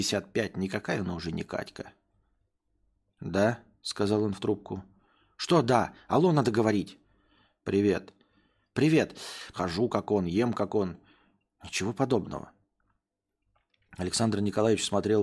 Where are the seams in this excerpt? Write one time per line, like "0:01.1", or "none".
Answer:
0:09.5